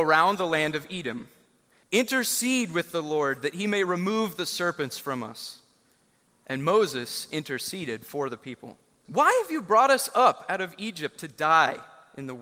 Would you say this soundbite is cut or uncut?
cut